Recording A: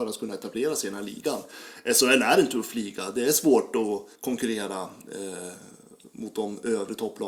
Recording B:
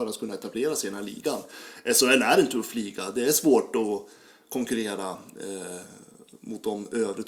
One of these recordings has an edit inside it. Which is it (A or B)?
A